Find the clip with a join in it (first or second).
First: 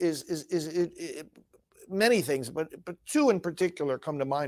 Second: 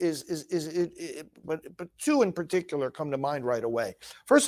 second